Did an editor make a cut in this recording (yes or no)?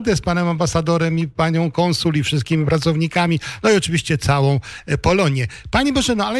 no